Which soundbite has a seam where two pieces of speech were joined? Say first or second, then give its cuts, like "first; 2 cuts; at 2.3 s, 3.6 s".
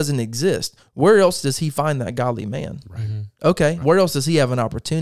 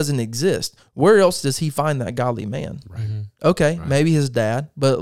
first; 1 cut; at 3.8 s